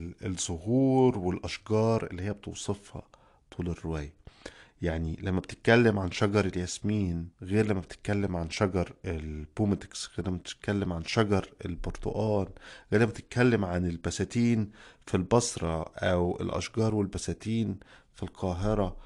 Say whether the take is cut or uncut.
cut